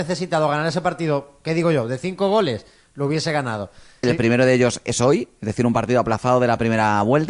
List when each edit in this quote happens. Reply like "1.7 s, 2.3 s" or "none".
4.0 s